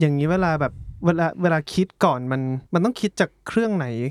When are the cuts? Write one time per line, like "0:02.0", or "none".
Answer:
0:02.7